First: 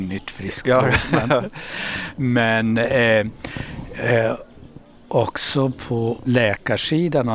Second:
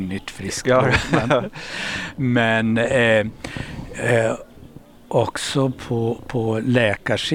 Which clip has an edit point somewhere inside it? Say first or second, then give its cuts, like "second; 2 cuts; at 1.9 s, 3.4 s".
first; 1 cut; at 6.2 s